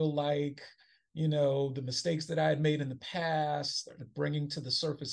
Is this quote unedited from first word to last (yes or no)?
yes